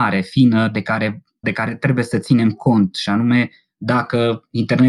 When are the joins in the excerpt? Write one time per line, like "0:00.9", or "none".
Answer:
0:01.4